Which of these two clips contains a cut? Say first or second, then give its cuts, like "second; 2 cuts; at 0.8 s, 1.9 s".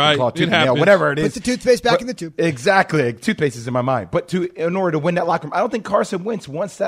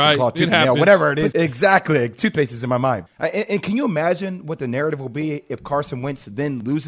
second; 2 cuts; at 1.3 s, 3.1 s